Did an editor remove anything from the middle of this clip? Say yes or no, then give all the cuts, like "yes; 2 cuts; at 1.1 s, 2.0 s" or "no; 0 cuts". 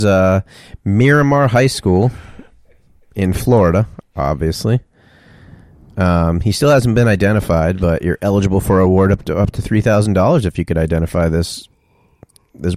no; 0 cuts